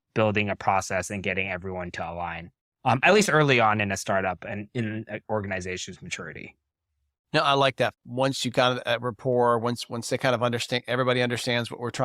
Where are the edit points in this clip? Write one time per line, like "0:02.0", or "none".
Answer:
0:07.9